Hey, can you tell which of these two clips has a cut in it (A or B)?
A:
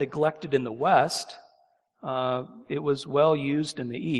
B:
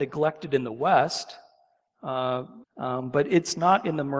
B